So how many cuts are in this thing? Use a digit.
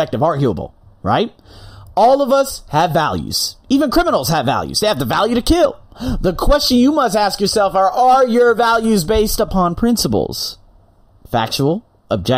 1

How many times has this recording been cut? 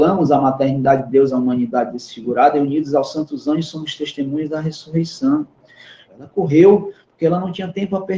1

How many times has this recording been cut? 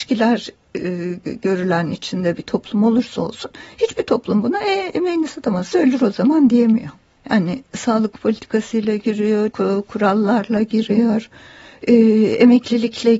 2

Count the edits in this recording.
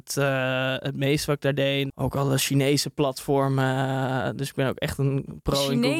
1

